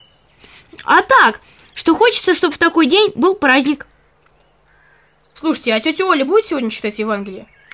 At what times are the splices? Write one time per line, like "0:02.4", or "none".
0:01.6